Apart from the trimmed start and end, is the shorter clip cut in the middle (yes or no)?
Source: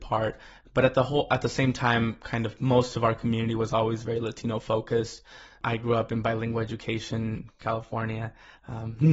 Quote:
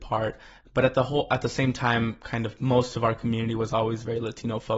no